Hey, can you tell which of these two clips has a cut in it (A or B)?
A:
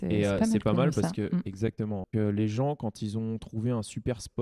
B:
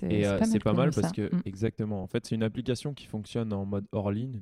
A